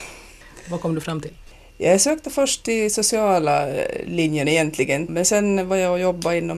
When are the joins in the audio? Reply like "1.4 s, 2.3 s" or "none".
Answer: 5.1 s

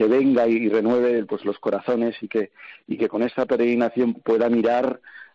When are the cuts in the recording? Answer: 4.1 s

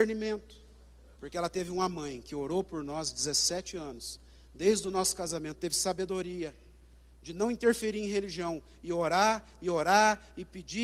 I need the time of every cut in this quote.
1.1 s

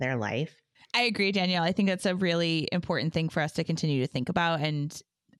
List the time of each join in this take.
none

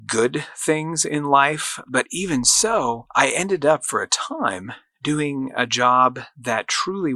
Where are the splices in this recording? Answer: 1.8 s

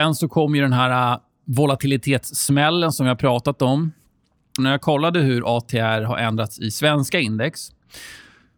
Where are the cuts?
4.6 s

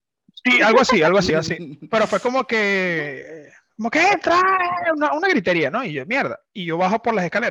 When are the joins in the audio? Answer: 1.3 s

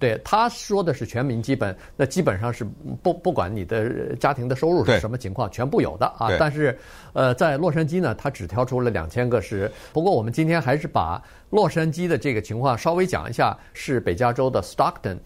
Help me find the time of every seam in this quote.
9.9 s, 13.7 s

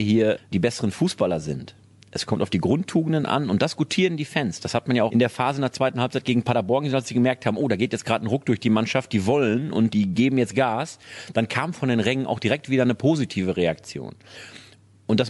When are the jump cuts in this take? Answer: none

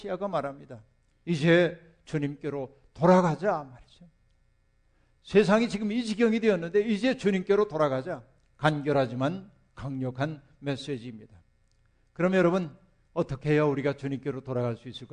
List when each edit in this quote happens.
none

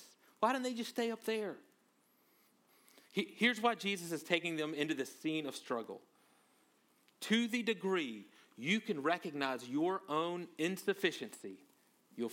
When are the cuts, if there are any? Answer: none

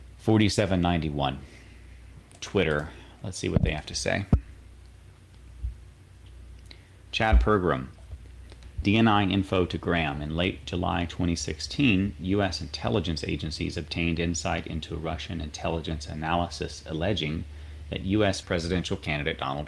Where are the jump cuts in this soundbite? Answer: 8.8 s, 18.4 s

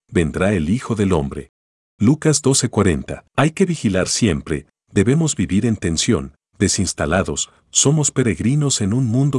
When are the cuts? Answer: 3.3 s

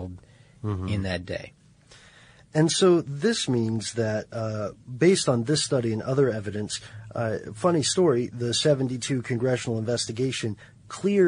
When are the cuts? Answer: none

